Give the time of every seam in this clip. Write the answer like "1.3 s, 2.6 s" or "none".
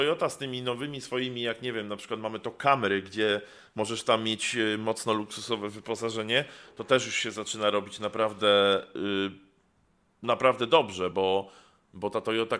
none